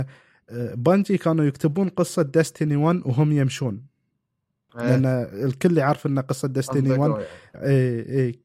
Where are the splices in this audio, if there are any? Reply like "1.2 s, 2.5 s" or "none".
7.5 s